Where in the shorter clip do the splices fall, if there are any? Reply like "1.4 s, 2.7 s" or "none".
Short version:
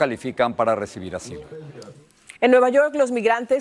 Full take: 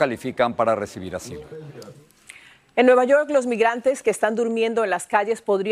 2.4 s